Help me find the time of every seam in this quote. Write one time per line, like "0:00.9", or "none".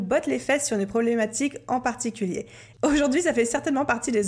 0:02.7